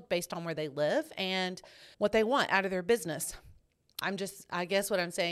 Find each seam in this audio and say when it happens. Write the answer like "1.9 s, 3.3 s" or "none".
1.9 s, 4.0 s